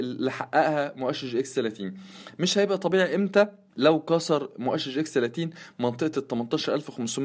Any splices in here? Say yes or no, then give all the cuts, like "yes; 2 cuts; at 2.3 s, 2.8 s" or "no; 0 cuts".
yes; 1 cut; at 3.7 s